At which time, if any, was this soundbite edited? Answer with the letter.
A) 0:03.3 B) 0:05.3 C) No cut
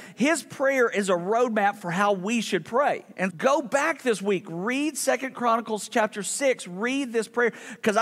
A